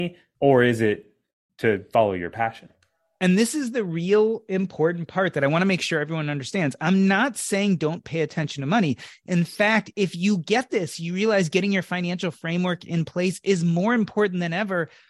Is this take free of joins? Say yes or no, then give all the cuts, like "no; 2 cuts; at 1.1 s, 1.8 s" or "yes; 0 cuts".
yes; 0 cuts